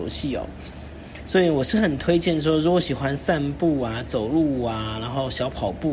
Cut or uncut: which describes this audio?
uncut